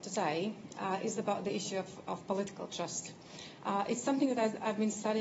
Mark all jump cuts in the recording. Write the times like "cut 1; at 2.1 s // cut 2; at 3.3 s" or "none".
none